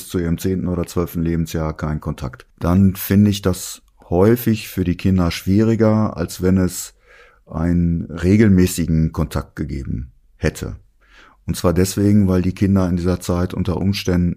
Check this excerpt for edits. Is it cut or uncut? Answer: uncut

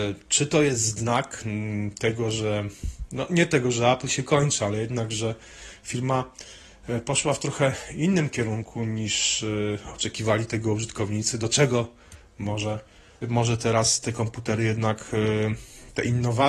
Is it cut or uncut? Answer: cut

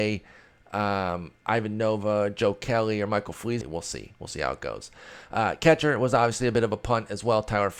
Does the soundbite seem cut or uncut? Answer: cut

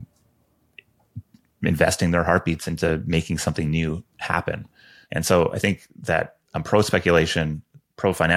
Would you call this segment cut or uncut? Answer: cut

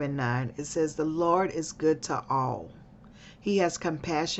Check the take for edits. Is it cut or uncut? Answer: uncut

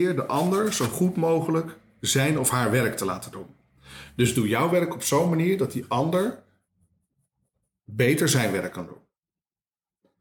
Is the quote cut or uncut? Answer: uncut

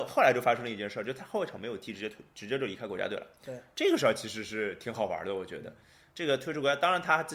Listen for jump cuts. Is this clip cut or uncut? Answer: uncut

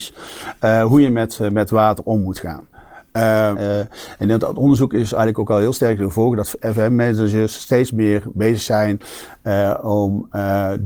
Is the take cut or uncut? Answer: cut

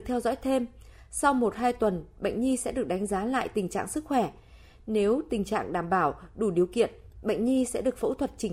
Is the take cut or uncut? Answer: uncut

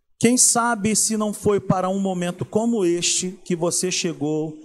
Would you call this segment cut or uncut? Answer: uncut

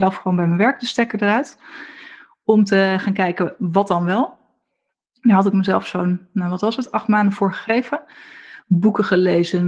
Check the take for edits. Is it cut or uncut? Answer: uncut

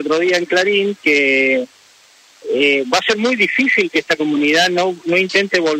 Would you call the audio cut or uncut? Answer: uncut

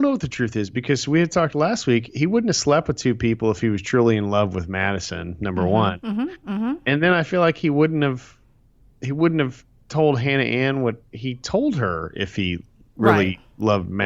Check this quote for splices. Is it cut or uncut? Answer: uncut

